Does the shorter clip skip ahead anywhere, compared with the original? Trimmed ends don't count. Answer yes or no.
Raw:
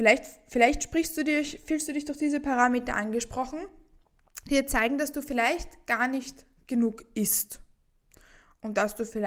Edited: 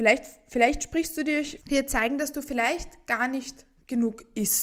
yes